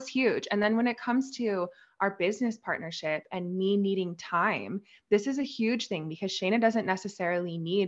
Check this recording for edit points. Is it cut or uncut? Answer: uncut